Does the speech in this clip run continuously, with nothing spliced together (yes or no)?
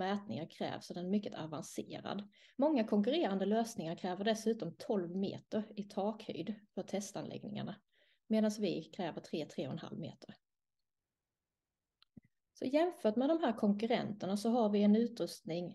yes